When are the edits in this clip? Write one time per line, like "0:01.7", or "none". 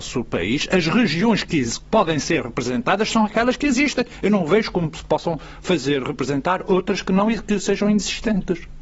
0:07.4